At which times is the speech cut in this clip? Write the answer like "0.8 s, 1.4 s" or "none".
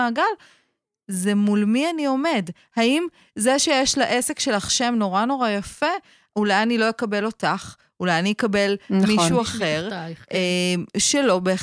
none

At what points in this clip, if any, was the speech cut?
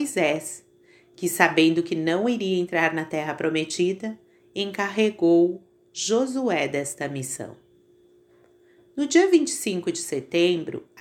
none

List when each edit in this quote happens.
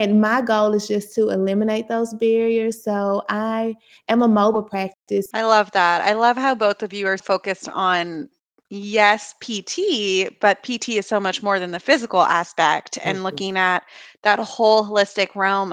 5.3 s, 7.2 s

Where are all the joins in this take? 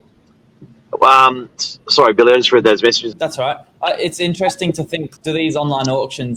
3.1 s, 5.2 s

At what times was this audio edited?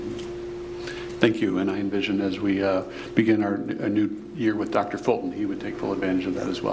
none

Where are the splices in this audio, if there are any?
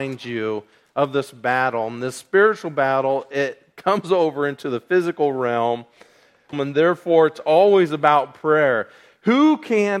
6.5 s

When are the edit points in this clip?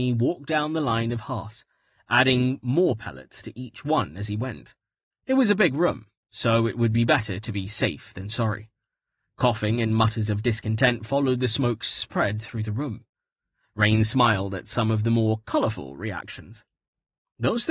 none

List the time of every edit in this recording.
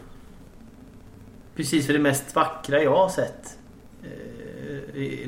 1.5 s

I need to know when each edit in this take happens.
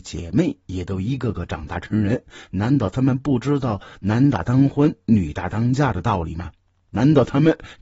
none

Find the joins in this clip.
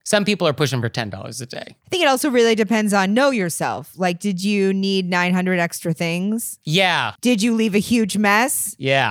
7.2 s

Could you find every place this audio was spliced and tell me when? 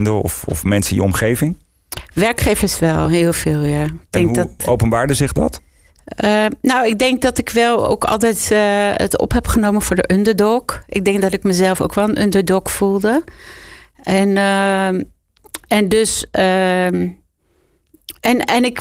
none

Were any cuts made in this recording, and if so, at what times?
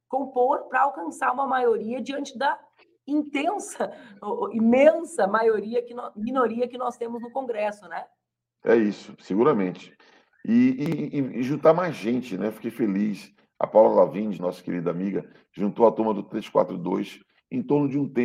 14.4 s

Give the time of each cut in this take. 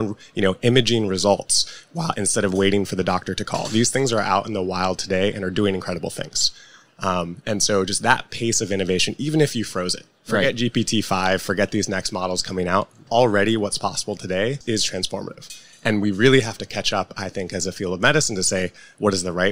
none

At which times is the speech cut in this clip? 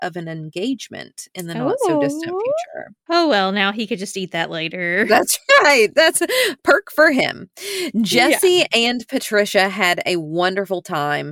3.1 s

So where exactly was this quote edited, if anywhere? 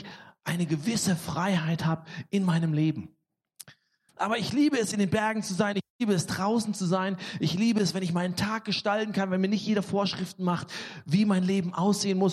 4.1 s

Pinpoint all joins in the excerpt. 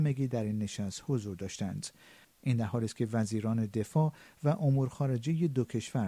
2.2 s

